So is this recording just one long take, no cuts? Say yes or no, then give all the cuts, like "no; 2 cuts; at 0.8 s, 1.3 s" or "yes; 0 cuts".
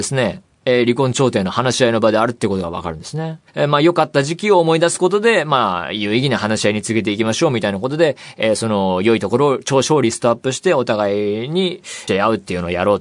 no; 2 cuts; at 3.5 s, 12.1 s